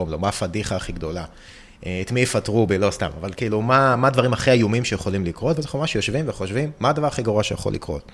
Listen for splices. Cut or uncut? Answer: uncut